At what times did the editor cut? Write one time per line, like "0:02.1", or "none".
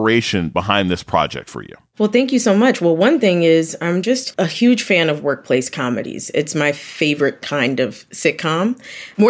none

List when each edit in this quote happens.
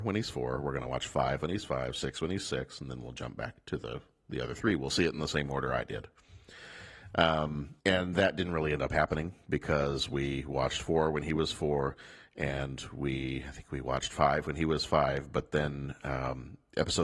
0:07.8

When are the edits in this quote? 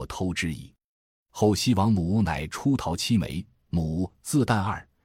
none

